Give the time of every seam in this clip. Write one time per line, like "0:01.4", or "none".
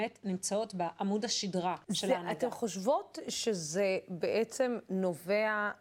0:01.8